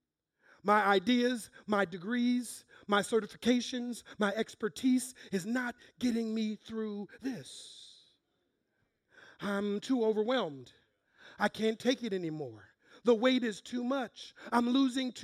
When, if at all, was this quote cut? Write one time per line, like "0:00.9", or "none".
none

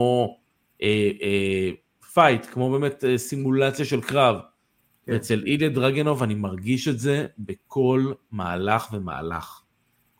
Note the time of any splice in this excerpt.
none

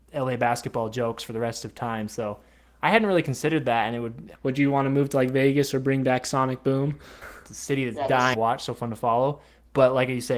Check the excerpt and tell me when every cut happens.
0:04.3
0:07.2
0:08.3

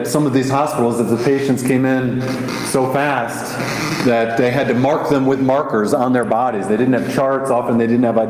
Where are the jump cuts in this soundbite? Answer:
none

